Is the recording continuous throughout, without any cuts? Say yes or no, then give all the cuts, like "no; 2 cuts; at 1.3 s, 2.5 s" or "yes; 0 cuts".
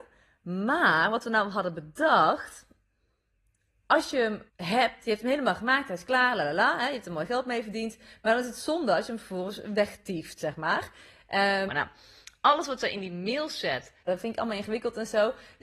no; 3 cuts; at 4.5 s, 11.7 s, 14.1 s